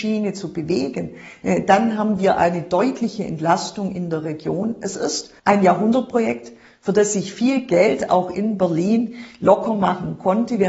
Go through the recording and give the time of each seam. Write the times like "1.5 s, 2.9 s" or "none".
5.4 s

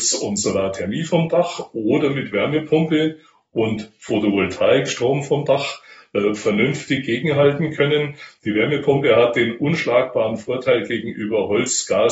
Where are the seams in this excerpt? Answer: none

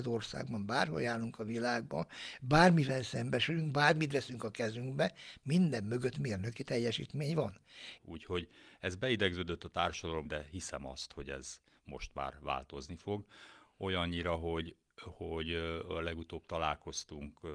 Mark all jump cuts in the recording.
8.0 s, 10.3 s

